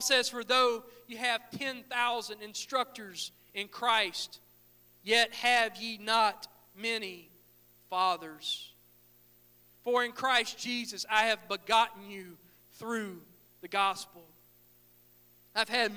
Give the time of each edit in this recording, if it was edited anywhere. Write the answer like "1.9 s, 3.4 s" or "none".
none